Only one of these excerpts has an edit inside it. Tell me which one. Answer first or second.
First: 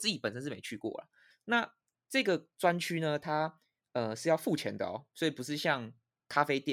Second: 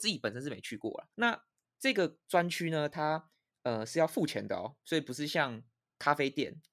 second